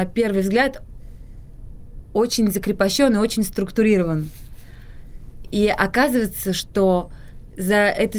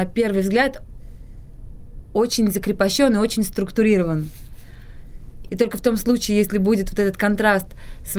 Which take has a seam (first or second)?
second